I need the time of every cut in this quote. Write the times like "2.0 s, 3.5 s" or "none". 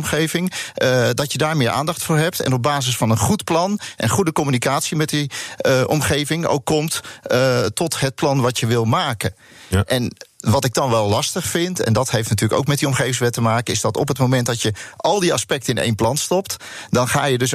none